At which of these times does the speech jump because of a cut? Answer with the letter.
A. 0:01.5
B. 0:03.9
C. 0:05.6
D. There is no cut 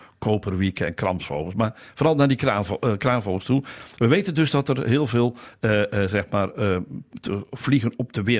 D